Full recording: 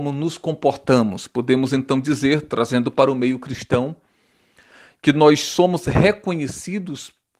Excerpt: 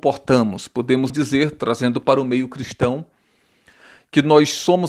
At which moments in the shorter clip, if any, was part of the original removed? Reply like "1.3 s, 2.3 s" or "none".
1.1 s